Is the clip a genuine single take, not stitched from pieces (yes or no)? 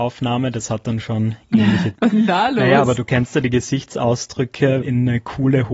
no